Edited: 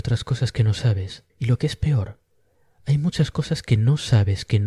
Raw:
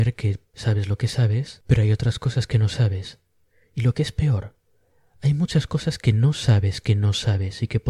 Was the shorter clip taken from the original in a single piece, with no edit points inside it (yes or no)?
no